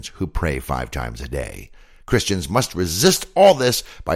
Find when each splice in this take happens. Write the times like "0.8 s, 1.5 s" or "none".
none